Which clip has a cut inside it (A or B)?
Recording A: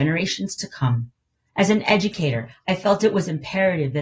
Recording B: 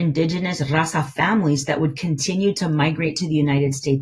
A